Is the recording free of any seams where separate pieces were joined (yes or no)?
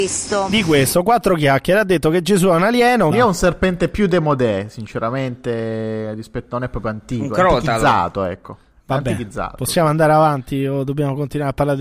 no